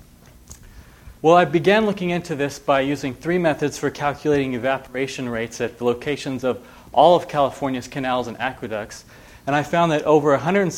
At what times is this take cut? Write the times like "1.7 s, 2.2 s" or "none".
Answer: 1.2 s